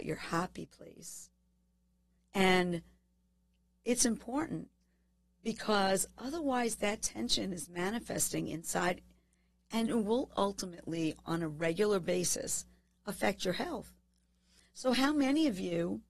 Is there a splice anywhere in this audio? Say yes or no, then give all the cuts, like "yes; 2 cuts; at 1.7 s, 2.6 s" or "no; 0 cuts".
yes; 1 cut; at 2.2 s